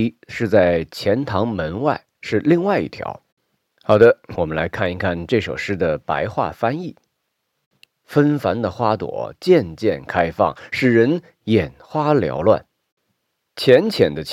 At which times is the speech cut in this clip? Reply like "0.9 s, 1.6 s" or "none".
4.4 s, 7.9 s